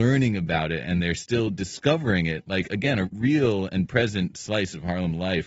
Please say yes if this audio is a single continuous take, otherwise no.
no